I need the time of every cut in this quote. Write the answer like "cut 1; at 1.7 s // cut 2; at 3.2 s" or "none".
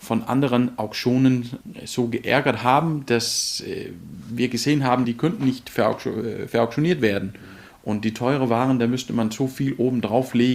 cut 1; at 5.0 s